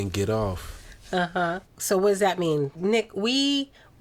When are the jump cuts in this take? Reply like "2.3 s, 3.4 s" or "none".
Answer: 1.7 s, 2.7 s